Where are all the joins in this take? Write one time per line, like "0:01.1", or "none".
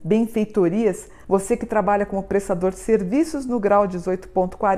0:01.2